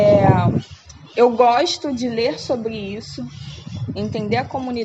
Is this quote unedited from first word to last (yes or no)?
no